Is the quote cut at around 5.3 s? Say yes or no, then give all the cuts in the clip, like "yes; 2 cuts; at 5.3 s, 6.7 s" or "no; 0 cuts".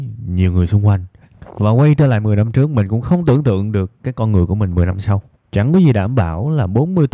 yes; 2 cuts; at 1.3 s, 5.3 s